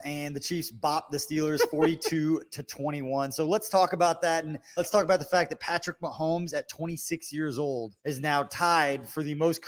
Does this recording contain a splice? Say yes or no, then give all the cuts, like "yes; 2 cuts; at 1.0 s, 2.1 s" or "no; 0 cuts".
yes; 2 cuts; at 4.8 s, 8.0 s